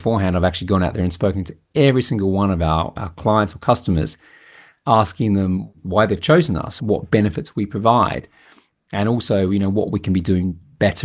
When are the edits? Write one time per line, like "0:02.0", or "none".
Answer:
0:06.8